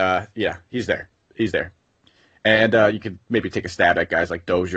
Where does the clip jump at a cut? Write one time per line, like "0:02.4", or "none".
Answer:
none